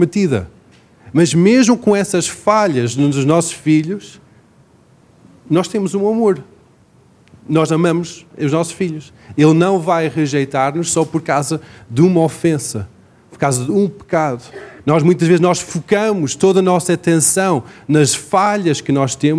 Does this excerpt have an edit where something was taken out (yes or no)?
yes